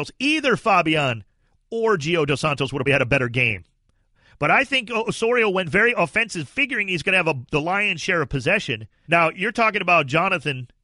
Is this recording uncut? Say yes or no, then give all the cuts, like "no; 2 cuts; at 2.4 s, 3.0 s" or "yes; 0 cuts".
no; 2 cuts; at 2.9 s, 9.0 s